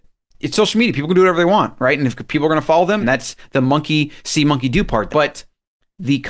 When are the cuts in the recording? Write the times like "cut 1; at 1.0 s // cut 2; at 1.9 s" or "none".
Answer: cut 1; at 3.0 s // cut 2; at 5.1 s